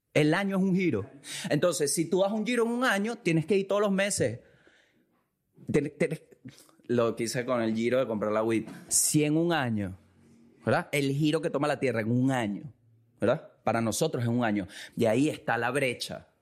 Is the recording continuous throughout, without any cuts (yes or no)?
no